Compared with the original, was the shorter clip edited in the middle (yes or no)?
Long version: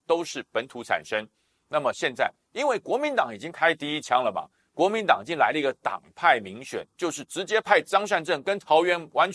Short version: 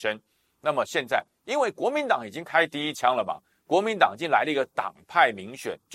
no